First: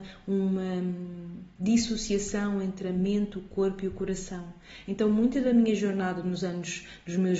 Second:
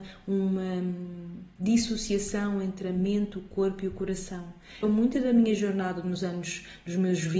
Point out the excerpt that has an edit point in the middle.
second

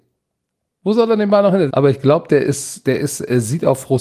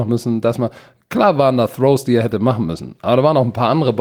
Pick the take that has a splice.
first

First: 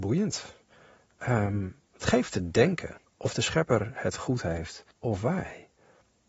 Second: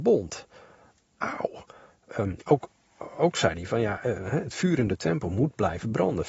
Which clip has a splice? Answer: first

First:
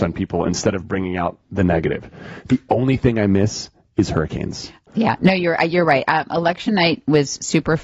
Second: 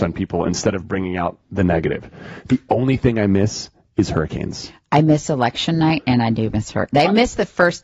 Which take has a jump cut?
first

